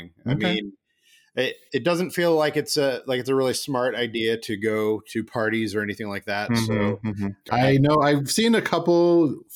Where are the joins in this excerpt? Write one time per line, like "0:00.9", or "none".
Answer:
0:07.5